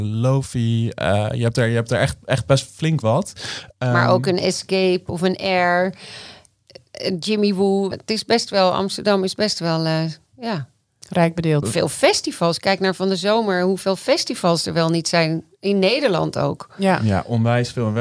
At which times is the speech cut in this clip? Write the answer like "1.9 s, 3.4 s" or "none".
7.9 s, 11.6 s